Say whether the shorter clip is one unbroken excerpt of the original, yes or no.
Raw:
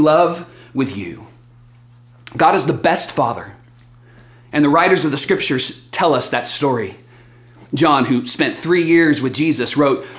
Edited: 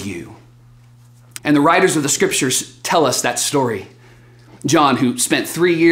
no